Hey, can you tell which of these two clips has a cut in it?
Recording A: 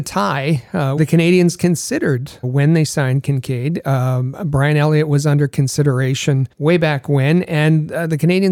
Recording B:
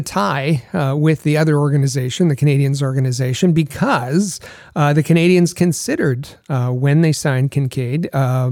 A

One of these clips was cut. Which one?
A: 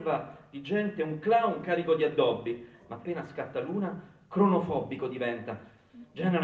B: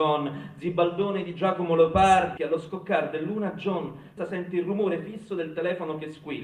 B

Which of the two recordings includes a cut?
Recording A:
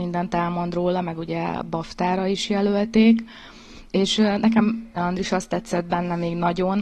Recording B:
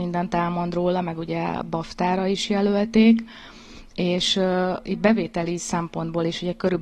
A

